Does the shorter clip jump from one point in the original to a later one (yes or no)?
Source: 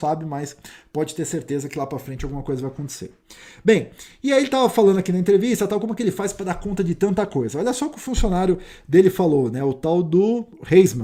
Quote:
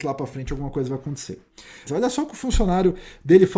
yes